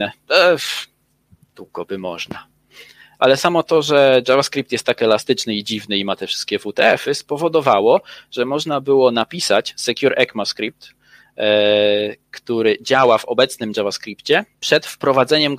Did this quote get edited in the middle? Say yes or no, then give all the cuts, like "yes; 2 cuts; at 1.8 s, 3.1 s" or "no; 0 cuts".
yes; 1 cut; at 14.5 s